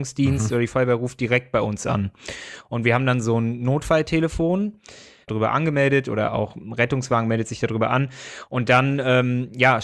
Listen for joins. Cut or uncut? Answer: cut